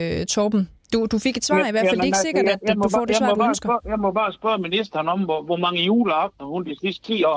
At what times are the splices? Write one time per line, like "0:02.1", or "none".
none